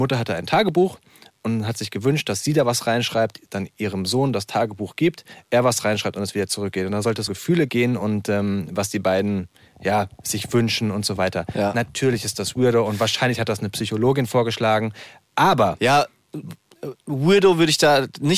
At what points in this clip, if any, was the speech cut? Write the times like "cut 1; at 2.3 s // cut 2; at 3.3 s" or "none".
cut 1; at 7.3 s